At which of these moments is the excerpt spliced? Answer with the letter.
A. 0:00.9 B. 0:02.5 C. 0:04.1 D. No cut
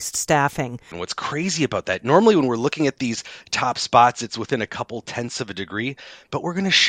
A